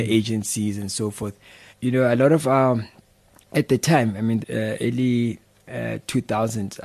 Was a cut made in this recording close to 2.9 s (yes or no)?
no